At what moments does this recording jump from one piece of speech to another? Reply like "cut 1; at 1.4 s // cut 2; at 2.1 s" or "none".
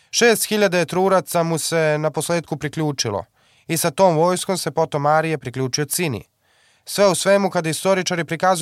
none

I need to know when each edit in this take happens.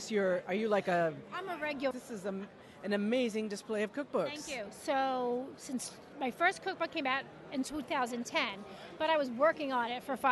cut 1; at 1.9 s

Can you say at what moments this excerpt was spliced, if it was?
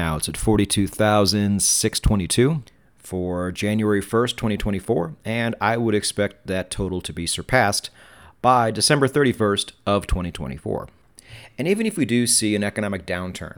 none

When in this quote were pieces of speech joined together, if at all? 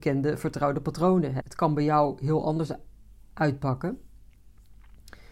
cut 1; at 1.4 s

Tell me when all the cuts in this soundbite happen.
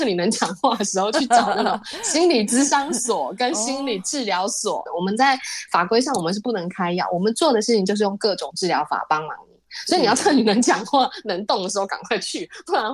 cut 1; at 4.9 s

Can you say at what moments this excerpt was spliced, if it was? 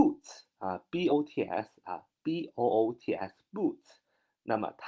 cut 1; at 1.1 s

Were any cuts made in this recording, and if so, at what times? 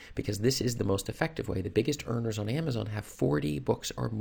none

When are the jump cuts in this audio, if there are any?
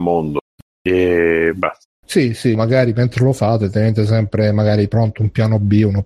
cut 1; at 2.5 s

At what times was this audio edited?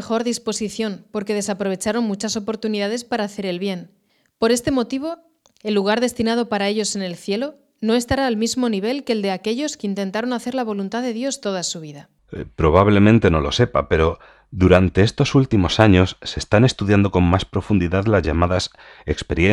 none

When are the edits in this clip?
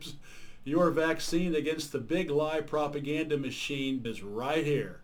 cut 1; at 4.0 s

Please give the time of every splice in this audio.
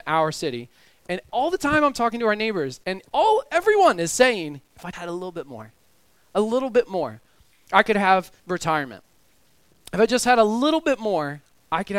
cut 1; at 4.9 s // cut 2; at 8.4 s

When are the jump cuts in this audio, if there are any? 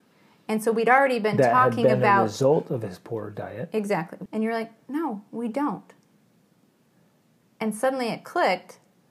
cut 1; at 4.3 s

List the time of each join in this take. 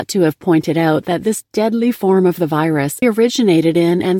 cut 1; at 3.0 s

